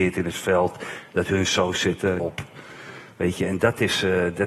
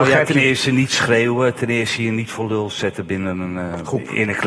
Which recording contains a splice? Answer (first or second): first